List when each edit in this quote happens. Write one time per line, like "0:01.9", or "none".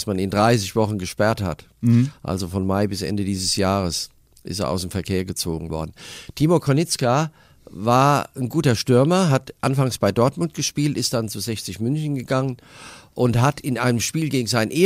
none